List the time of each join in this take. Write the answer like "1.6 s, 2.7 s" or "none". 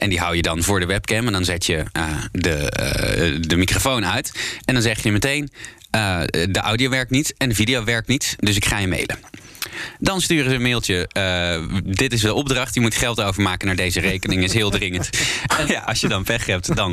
15.7 s